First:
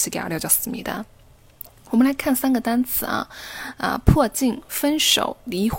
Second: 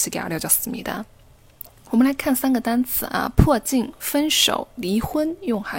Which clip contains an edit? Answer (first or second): second